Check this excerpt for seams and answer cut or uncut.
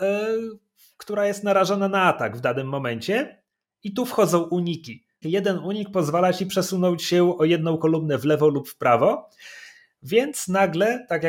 cut